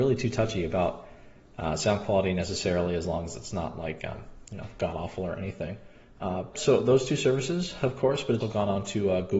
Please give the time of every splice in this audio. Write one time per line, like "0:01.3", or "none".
0:06.5
0:08.4